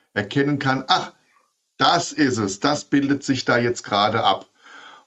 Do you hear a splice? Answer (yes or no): no